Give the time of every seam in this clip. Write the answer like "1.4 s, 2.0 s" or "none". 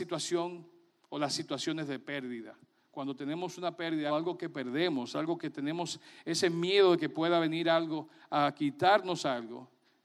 4.1 s

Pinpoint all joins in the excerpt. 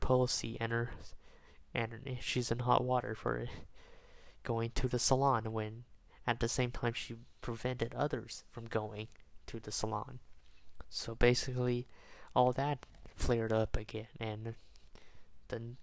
none

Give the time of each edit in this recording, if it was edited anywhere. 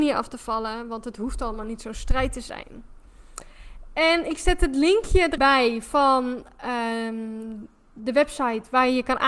5.4 s

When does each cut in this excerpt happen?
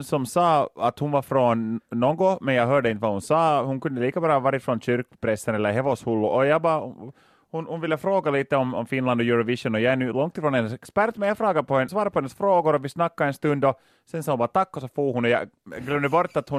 11.9 s

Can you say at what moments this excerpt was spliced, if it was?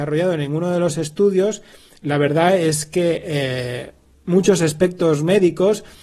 none

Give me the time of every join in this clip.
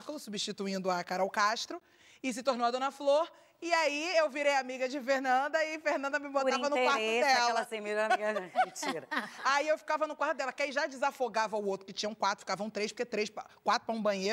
none

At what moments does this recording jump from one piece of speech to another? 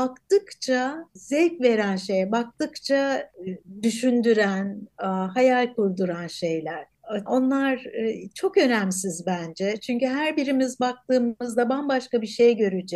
7.3 s

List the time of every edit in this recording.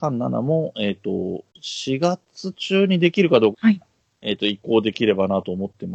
1.5 s, 3.5 s

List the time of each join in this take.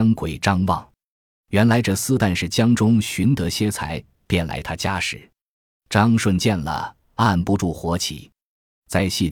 none

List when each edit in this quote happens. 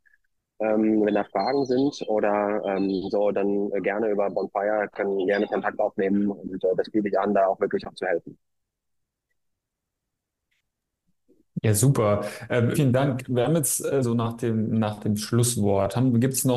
12.7 s, 14.0 s

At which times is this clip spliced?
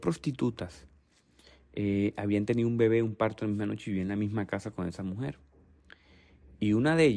none

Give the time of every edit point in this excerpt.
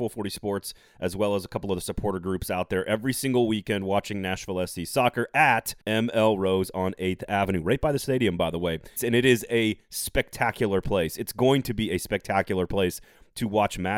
5.8 s, 9.0 s

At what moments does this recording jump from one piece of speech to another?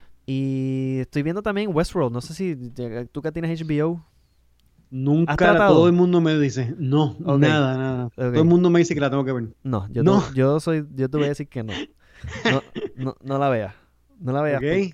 9.5 s

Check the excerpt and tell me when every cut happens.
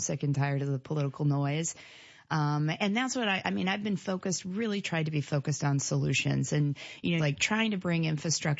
7.2 s

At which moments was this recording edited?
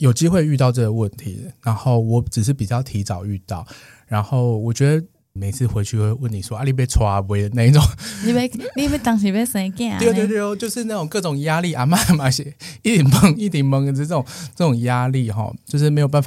5.4 s

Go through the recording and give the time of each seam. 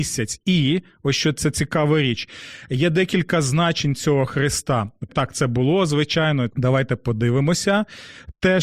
5.1 s, 6.5 s

